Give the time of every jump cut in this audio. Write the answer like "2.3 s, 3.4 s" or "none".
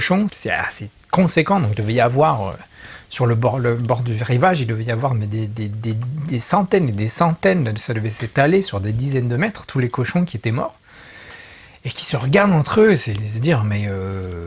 none